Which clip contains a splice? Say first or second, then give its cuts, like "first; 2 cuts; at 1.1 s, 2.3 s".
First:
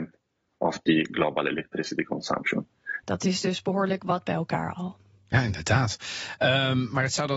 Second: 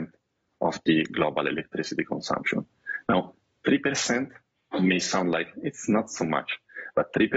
first; 1 cut; at 3.0 s